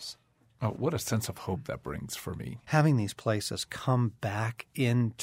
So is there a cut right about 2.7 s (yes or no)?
yes